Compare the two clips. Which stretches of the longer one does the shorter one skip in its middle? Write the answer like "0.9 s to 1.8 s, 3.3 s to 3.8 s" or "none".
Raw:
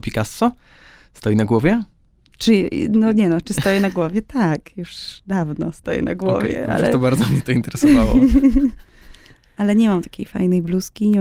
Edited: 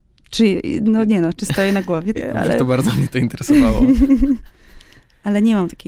4.2 s to 6.5 s